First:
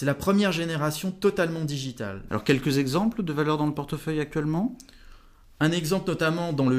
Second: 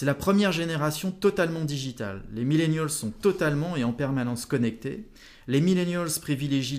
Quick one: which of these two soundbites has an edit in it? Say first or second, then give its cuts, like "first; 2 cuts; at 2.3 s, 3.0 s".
first; 1 cut; at 2.3 s